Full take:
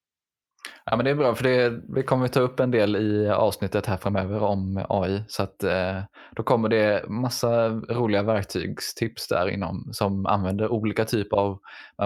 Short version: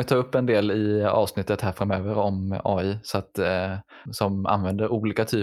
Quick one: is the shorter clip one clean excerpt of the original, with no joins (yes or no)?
no